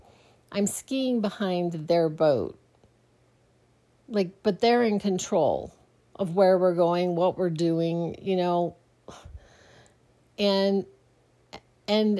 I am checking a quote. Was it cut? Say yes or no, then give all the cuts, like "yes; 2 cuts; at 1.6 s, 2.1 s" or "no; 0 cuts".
no; 0 cuts